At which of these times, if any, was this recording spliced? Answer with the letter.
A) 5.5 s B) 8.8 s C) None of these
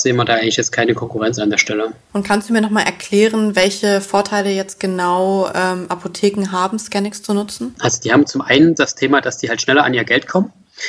B